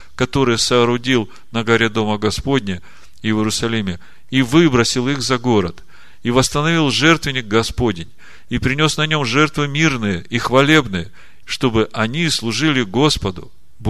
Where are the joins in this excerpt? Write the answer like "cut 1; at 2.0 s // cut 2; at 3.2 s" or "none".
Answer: cut 1; at 11.4 s